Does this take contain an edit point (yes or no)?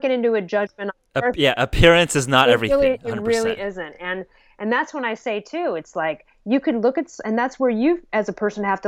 no